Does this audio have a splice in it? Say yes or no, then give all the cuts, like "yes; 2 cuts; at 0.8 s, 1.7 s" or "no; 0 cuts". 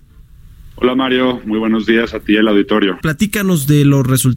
yes; 1 cut; at 3.0 s